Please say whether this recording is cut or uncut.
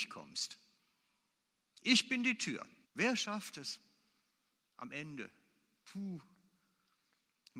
cut